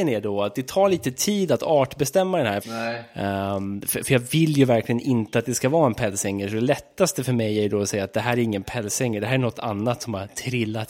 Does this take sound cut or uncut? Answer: cut